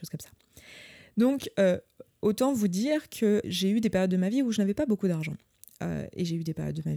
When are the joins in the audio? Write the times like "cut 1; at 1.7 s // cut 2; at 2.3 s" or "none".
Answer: cut 1; at 3.4 s